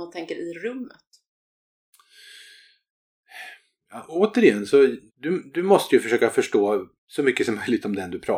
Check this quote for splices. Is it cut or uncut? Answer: cut